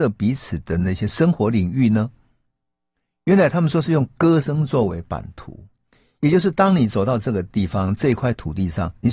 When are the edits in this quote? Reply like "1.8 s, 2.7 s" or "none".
none